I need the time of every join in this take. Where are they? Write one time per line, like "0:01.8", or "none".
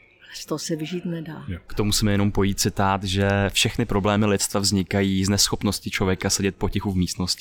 0:01.7